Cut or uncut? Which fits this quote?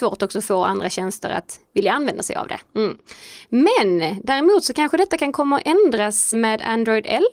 cut